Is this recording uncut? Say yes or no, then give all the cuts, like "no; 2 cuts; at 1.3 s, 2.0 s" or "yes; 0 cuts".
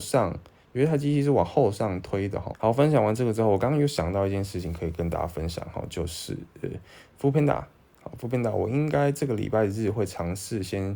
no; 1 cut; at 2.5 s